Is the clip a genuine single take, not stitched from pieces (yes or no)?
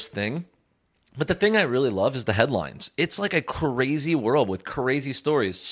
yes